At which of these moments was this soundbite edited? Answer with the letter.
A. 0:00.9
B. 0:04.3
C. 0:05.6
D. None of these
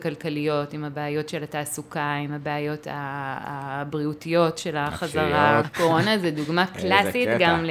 C